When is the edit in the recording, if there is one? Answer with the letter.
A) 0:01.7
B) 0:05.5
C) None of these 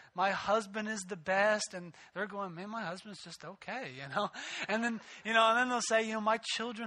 C